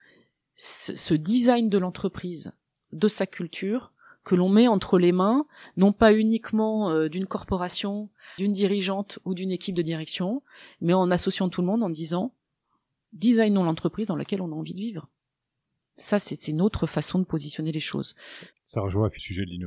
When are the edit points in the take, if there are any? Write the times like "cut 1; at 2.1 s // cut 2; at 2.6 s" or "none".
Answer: cut 1; at 16.2 s // cut 2; at 18.5 s